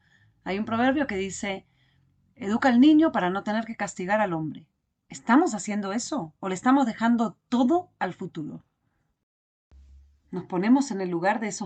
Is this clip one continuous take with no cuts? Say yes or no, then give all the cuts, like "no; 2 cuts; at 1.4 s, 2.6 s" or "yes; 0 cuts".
yes; 0 cuts